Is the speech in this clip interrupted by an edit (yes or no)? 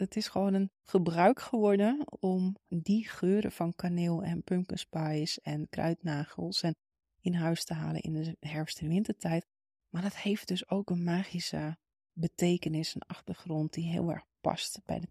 no